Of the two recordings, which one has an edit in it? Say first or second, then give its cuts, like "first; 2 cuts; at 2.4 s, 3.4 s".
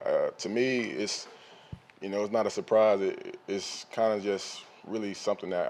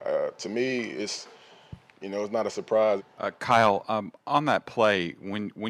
second; 1 cut; at 3.0 s